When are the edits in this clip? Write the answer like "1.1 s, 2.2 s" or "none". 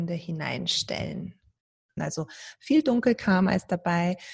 2.0 s